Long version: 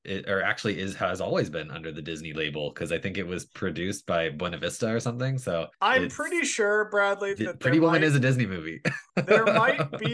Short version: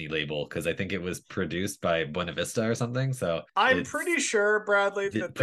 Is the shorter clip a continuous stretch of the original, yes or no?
yes